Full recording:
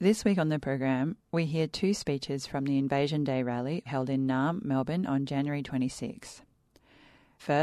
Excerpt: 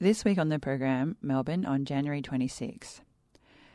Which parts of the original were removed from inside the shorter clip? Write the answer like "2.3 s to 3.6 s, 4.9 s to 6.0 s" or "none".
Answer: 1.2 s to 4.6 s